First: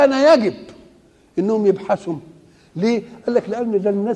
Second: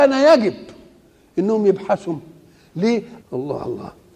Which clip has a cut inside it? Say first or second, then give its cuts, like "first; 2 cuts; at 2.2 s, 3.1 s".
second; 1 cut; at 3.2 s